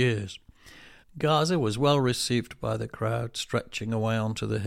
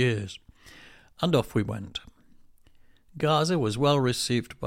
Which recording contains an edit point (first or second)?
first